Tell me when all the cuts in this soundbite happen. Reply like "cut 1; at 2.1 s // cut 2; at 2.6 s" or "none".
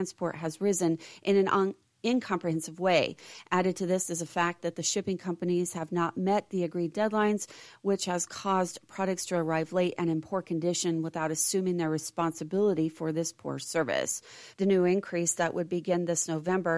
cut 1; at 14.5 s